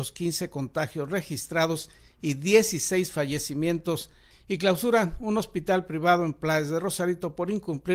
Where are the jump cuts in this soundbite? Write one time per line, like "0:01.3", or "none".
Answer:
0:04.3